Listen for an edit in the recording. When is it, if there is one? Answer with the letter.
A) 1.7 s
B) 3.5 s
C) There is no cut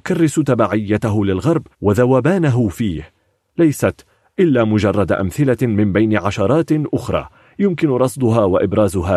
A